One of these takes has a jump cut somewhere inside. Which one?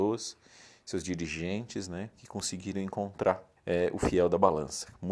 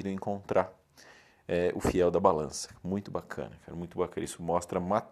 first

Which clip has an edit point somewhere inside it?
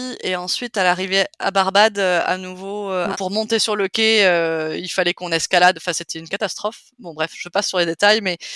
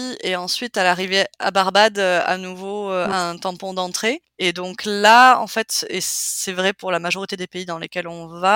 first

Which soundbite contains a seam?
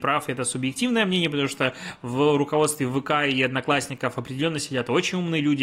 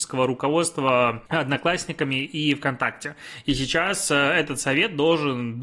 second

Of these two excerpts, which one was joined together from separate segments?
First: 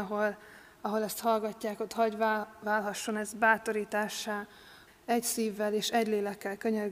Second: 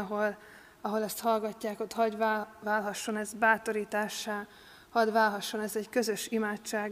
first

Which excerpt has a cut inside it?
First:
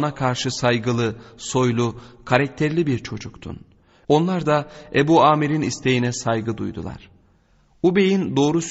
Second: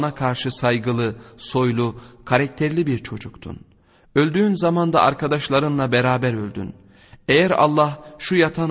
first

